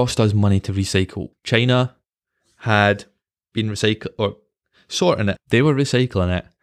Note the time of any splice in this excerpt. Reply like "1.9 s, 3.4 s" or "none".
1.3 s, 5.4 s